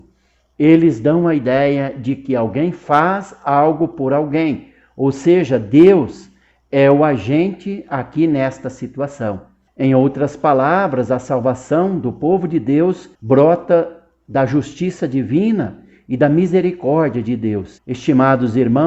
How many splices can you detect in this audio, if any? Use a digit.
3